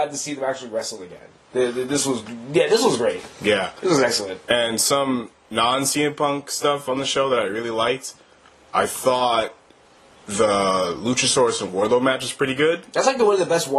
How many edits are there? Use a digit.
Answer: 0